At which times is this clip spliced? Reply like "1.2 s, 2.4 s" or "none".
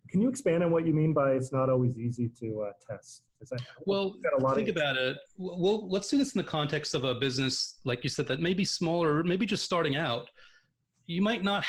none

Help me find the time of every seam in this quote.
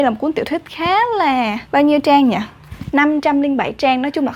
1.7 s

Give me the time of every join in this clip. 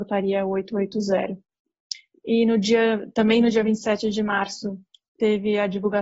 none

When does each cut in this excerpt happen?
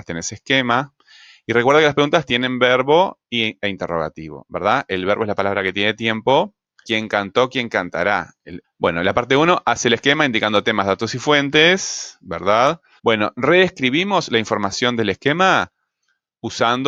6.8 s, 8.6 s, 13.0 s

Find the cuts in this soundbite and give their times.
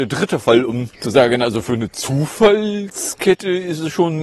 0.9 s

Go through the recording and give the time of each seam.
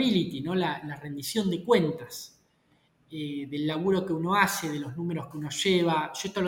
none

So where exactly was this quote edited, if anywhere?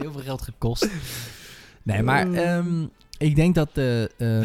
none

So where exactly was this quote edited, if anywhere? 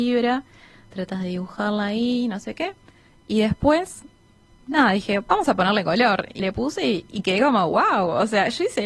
6.4 s

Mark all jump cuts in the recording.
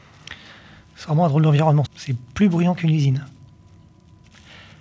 1.9 s

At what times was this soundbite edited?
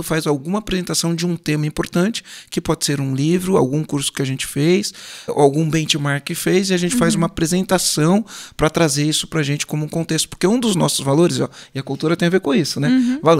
5.3 s

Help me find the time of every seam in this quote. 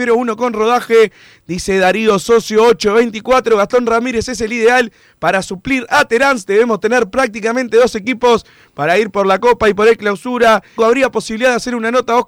10.8 s

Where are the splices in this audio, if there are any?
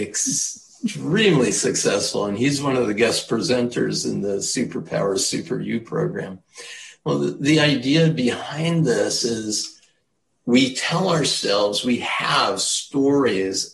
none

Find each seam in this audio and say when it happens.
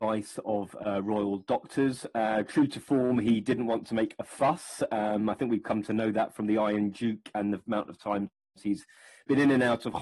none

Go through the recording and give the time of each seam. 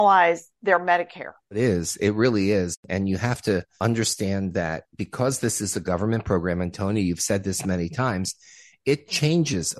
none

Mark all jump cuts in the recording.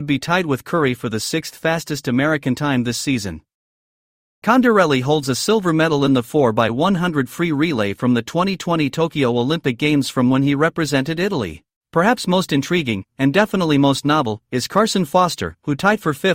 4.2 s

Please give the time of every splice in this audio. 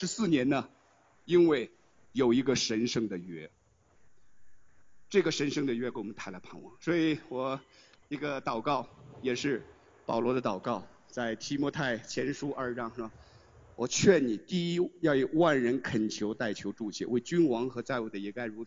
none

